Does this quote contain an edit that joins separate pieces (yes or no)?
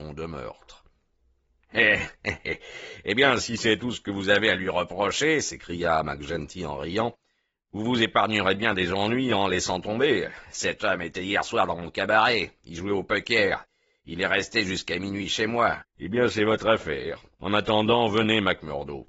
yes